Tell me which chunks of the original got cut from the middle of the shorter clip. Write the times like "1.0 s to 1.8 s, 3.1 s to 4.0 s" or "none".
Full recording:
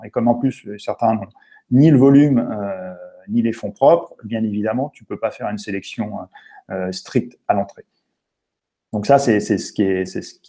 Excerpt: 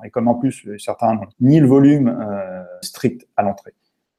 1.3 s to 1.6 s, 3.1 s to 6.9 s